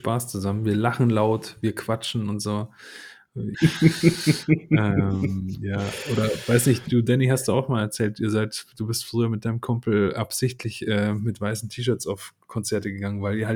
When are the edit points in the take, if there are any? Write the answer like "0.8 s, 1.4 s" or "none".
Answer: 3.5 s